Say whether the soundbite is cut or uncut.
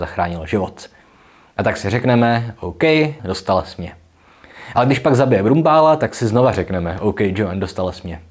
cut